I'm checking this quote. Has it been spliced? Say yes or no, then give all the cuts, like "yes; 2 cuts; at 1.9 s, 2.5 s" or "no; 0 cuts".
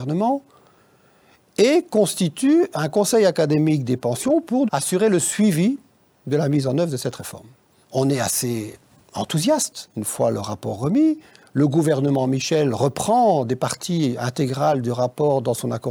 yes; 2 cuts; at 4.7 s, 7.8 s